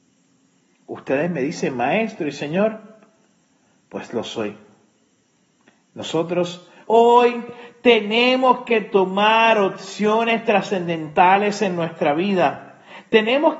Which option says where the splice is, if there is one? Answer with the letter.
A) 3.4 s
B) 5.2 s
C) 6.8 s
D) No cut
C